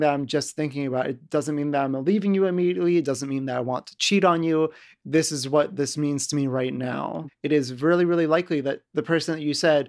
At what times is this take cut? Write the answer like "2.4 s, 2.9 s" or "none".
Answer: 7.3 s